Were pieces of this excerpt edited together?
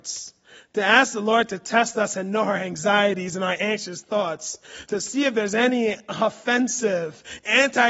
no; 0 cuts

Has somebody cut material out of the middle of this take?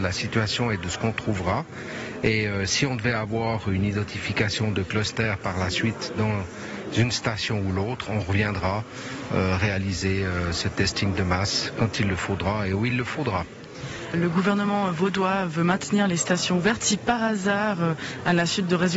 no; 0 cuts

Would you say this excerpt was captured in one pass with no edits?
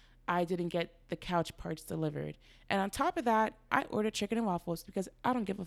no; 1 cut; at 3.7 s

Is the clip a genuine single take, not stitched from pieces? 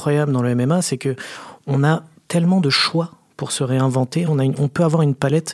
no; 1 cut; at 4.3 s

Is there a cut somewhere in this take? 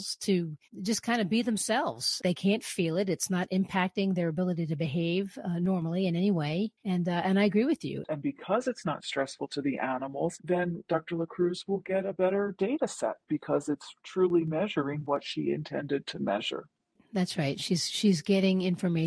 yes; 2 cuts; at 2.2 s, 8.0 s

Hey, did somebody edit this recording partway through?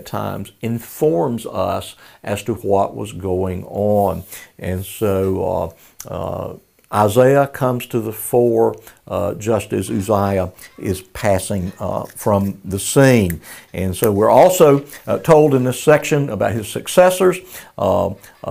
no; 0 cuts

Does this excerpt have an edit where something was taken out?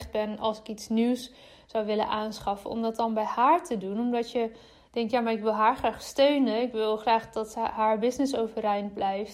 no; 0 cuts

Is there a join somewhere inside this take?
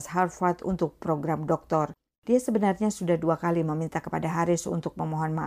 no; 0 cuts

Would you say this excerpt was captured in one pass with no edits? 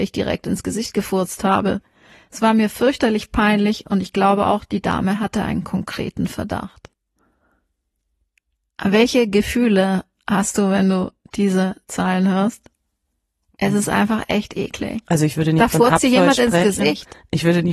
yes; 0 cuts

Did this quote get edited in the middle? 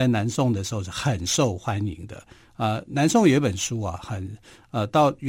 no; 0 cuts

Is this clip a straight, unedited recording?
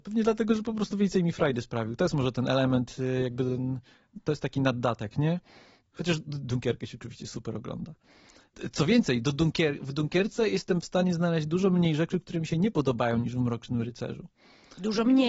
yes; 0 cuts

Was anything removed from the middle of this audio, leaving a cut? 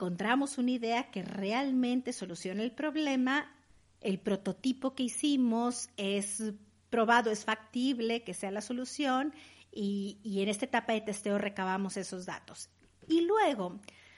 no; 0 cuts

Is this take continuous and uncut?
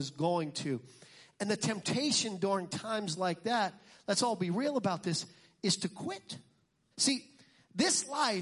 no; 1 cut; at 6.9 s

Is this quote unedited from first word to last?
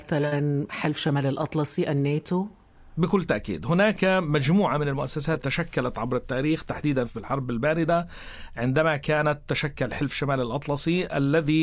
yes; 0 cuts

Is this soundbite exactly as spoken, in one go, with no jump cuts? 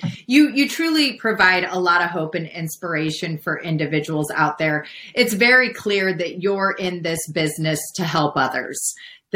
yes; 0 cuts

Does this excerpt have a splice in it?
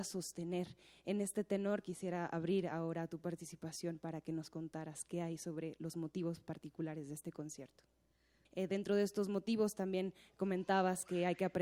yes; 1 cut; at 8.5 s

